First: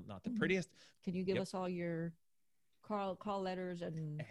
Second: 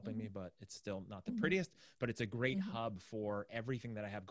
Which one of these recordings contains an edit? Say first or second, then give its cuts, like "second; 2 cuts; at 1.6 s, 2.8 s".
first; 1 cut; at 0.9 s